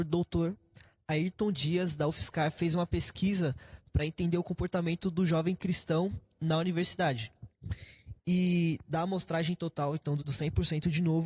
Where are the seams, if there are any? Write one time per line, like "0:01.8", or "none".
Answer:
0:08.2
0:10.2